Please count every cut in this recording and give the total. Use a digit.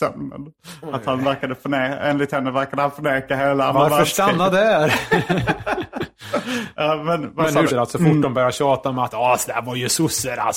1